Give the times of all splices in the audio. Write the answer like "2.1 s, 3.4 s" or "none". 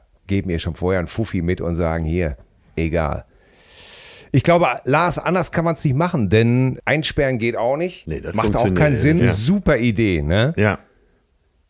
9.2 s